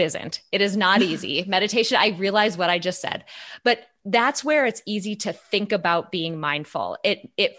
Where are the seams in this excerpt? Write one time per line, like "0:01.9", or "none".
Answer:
none